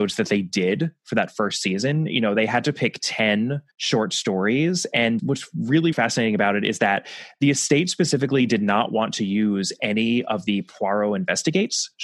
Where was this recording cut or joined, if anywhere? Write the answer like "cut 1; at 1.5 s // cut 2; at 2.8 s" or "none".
cut 1; at 3.7 s // cut 2; at 5.9 s